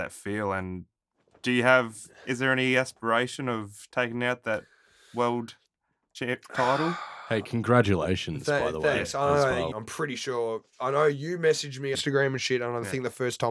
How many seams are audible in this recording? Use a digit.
2